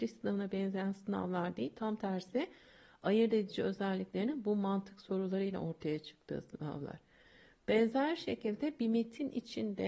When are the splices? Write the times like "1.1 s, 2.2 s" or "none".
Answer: none

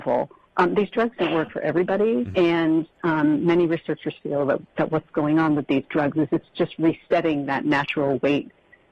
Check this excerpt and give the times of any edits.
2.3 s

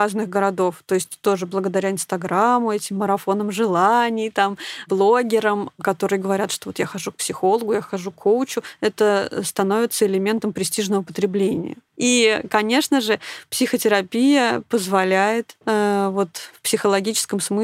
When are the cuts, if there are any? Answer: 15.6 s

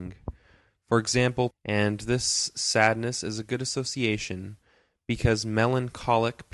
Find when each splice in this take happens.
1.5 s

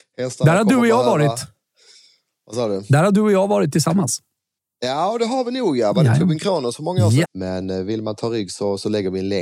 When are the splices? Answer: 7.2 s

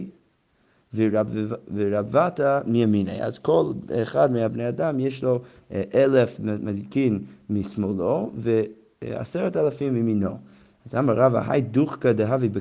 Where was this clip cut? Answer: none

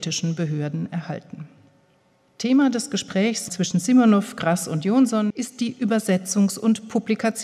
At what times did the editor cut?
none

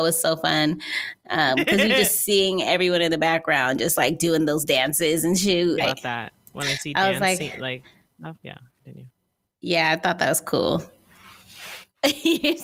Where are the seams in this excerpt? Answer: 5.8 s

